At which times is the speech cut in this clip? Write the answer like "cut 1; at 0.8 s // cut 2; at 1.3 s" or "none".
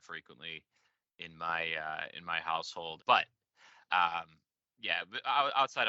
cut 1; at 3.0 s